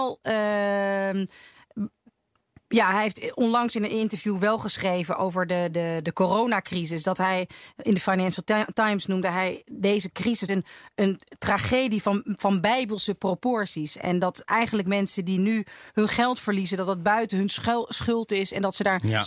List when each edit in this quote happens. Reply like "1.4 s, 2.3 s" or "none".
10.5 s